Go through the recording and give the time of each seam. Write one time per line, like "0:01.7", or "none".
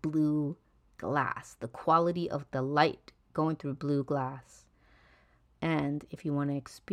0:05.5

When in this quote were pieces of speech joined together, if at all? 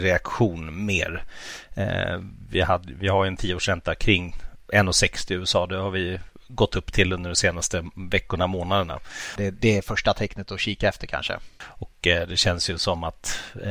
0:09.4
0:11.6

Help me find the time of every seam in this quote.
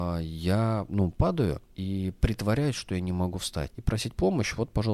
0:01.7
0:03.7

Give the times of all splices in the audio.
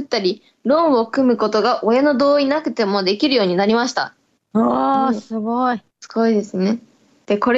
0:05.9

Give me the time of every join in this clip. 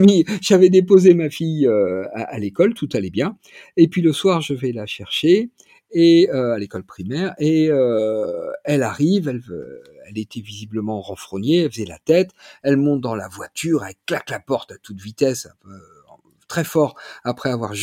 none

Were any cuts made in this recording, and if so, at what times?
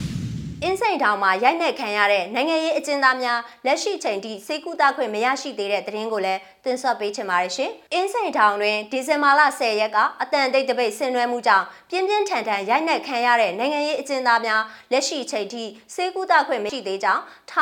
0:07.9
0:16.7

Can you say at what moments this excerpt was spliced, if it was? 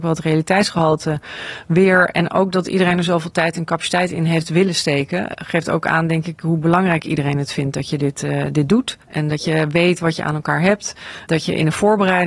0:09.1

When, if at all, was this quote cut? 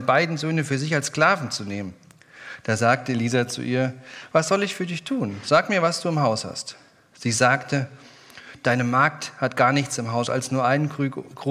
none

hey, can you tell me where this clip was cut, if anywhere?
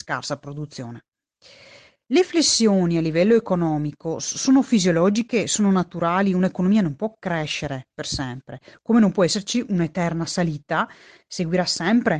none

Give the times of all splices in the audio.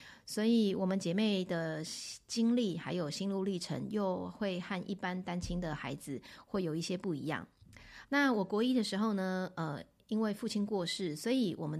0:08.0

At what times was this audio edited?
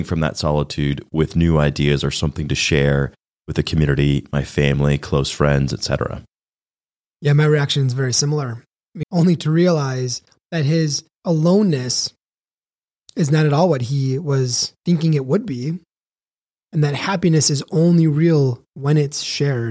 0:09.0
0:11.1
0:14.8

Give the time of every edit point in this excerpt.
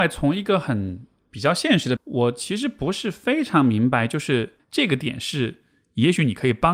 0:02.0
0:04.6

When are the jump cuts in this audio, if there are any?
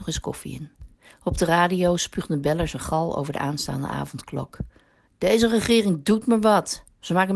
none

